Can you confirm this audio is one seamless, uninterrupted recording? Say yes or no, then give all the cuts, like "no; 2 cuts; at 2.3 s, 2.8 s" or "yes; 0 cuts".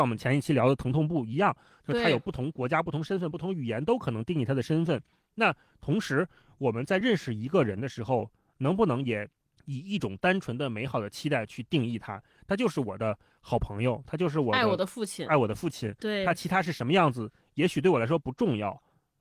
yes; 0 cuts